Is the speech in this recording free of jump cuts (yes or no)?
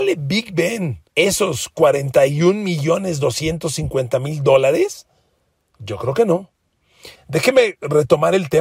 no